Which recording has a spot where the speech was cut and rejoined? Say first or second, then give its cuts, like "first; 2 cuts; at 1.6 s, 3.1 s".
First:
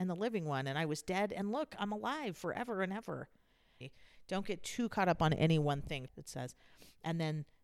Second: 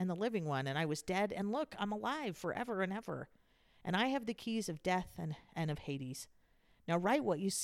first; 2 cuts; at 3.8 s, 6.1 s